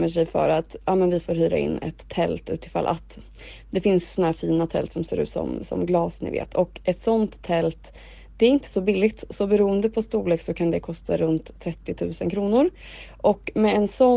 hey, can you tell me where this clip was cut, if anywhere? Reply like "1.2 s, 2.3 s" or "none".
none